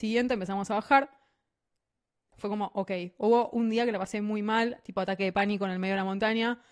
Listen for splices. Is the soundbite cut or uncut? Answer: cut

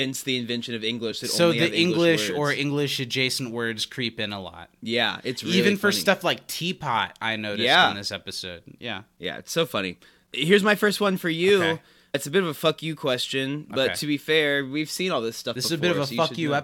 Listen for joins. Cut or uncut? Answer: uncut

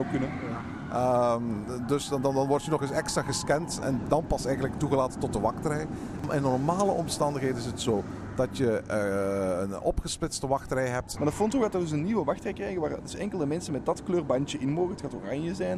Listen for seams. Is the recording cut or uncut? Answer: cut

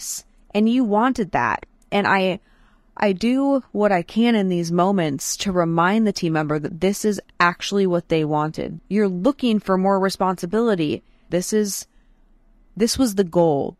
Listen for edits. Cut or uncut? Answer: cut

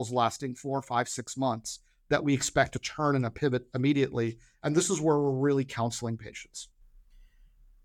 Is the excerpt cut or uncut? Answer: uncut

